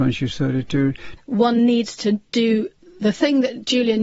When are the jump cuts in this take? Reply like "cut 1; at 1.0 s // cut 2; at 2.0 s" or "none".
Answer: cut 1; at 1.2 s